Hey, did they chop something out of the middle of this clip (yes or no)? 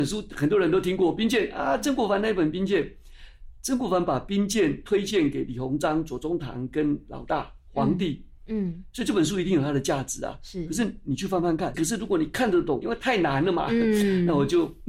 yes